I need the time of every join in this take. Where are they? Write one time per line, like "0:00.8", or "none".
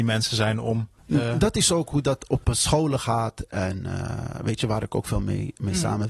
0:01.0